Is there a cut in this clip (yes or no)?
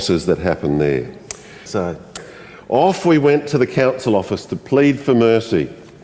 yes